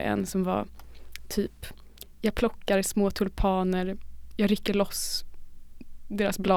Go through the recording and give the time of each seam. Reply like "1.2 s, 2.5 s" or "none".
4.3 s